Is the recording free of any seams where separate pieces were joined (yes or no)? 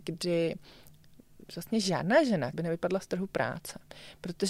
no